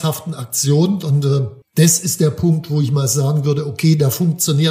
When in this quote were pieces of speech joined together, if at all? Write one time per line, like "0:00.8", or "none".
0:01.6